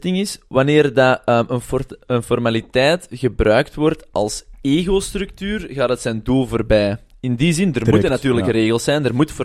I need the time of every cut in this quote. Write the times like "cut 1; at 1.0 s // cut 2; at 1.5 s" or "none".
none